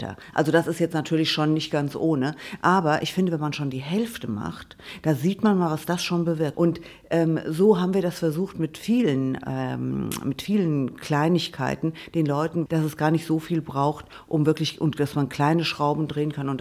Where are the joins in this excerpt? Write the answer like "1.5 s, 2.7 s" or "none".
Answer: 6.5 s, 12.7 s